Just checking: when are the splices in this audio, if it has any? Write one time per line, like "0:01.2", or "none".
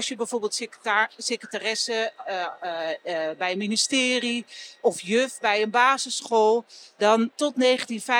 none